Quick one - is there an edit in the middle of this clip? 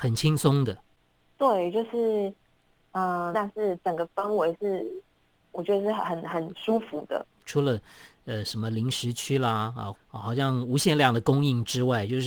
yes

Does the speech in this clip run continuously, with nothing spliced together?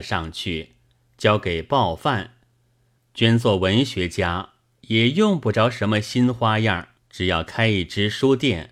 no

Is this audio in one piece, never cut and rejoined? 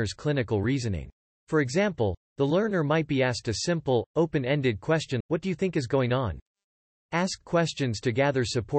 no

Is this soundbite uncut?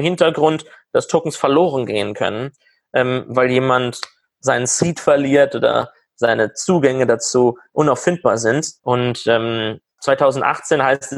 no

